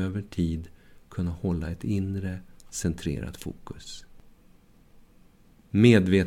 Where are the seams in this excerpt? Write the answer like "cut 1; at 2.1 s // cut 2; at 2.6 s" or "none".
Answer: cut 1; at 2.6 s